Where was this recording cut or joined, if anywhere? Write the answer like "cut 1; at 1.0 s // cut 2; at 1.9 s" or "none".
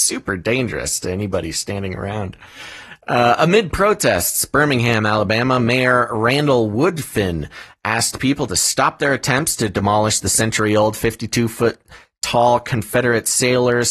none